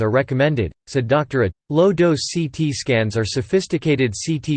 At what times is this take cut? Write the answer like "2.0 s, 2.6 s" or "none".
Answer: 1.5 s